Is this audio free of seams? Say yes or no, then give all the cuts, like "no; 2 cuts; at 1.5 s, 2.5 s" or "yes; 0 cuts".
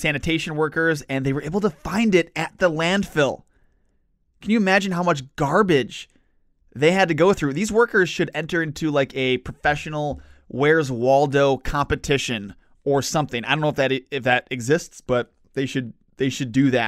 yes; 0 cuts